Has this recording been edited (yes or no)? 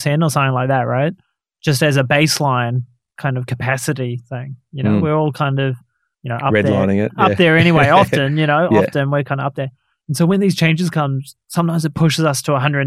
no